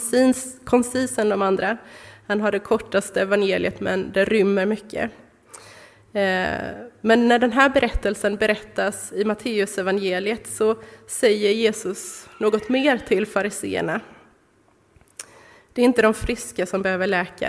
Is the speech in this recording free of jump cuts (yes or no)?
yes